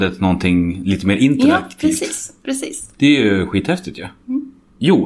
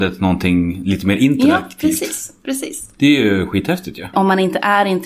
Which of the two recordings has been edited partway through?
second; 1 cut; at 4.1 s

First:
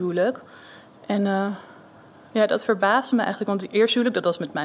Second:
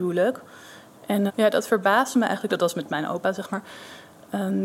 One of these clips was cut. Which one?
second; 2 cuts; at 1.3 s, 2.5 s

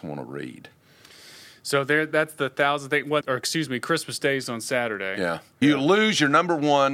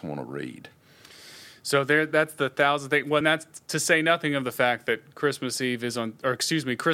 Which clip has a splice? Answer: first; 2 cuts; at 3.2 s, 5.6 s

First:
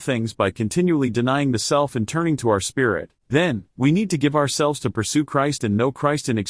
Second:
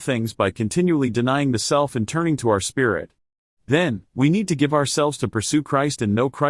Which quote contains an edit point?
first; 1 cut; at 3.2 s

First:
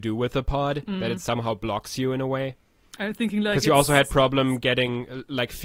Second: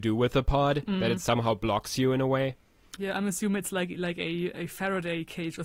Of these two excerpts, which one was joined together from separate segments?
second; 1 cut; at 2.9 s

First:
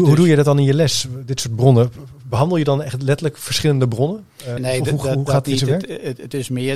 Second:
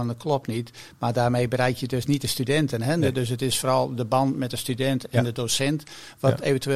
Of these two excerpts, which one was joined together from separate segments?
first; 1 cut; at 4.6 s

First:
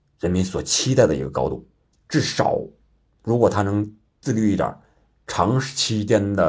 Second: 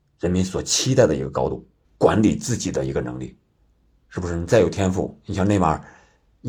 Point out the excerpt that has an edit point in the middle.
second; 1 cut; at 1.8 s

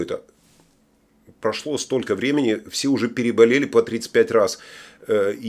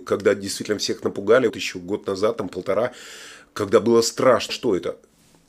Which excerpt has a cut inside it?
second; 2 cuts; at 1.5 s, 4.5 s

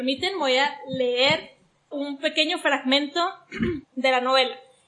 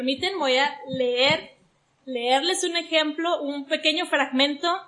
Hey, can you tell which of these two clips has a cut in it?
first; 2 cuts; at 1.9 s, 3.8 s

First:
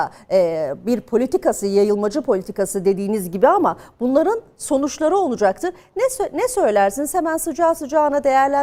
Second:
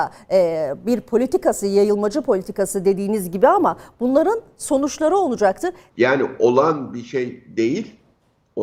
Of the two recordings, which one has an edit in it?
second; 1 cut; at 5.9 s

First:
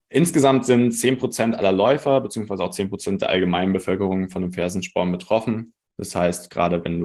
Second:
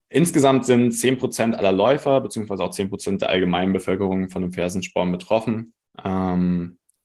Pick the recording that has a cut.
first; 1 cut; at 5.9 s

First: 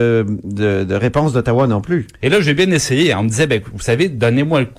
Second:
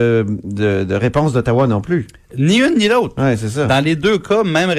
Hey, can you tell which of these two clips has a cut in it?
first; 1 cut; at 2.2 s

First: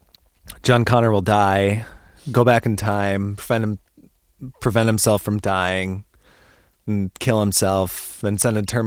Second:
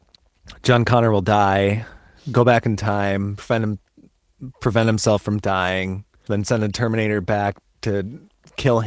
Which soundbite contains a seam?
second; 1 cut; at 6.3 s

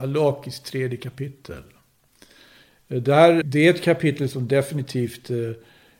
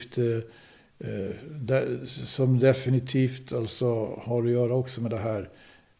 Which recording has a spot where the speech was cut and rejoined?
first; 1 cut; at 3.4 s

